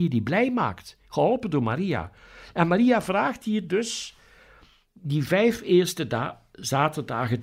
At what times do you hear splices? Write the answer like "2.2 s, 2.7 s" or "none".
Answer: none